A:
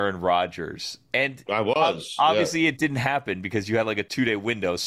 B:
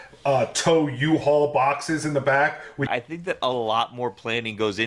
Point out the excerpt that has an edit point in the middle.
B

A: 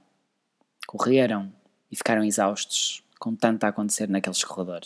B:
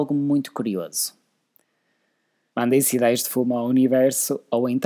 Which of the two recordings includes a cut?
B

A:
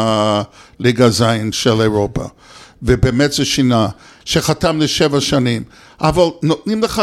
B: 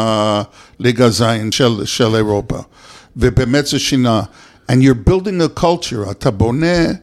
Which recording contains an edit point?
A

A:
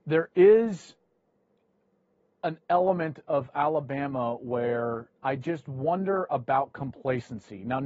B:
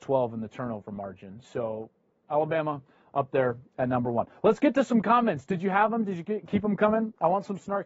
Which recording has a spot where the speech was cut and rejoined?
A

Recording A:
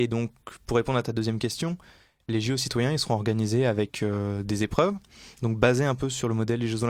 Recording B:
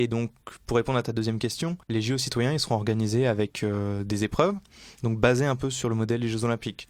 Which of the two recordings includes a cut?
B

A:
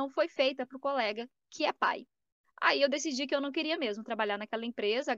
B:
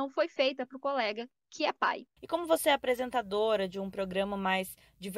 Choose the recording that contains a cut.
B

